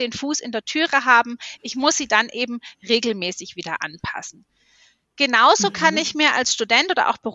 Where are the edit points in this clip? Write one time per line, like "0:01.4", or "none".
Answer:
none

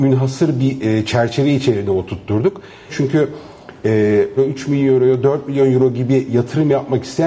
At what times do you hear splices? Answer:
0:02.9
0:04.4

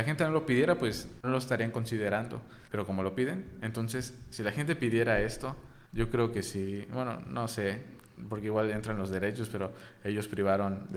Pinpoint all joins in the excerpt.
0:01.2
0:05.9

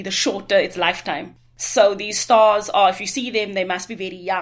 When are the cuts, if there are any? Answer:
none

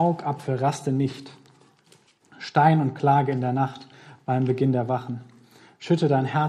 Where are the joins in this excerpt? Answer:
none

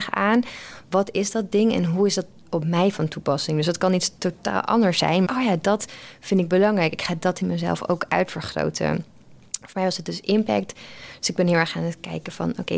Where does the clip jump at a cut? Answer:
0:05.2

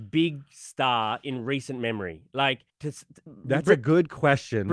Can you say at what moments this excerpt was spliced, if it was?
0:02.7

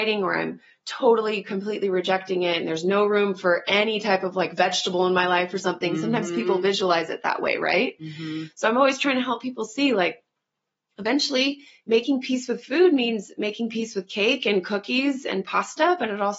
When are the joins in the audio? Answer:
none

